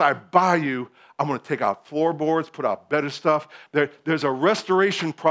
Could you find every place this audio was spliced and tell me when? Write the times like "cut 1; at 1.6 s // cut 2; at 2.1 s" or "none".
cut 1; at 3.7 s